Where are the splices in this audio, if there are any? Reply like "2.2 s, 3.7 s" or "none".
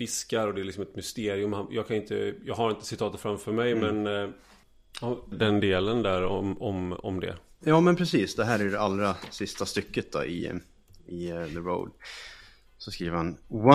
5.3 s